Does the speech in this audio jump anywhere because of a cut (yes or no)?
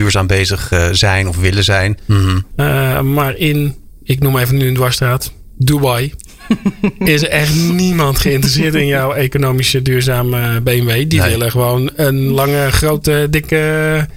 yes